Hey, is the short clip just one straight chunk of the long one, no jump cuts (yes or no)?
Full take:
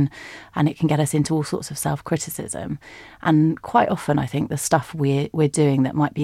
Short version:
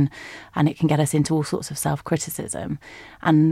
yes